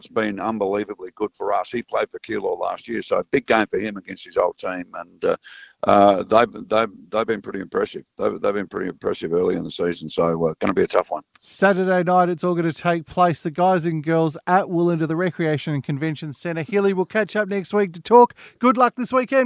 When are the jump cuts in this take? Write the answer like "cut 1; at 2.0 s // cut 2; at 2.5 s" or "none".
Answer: none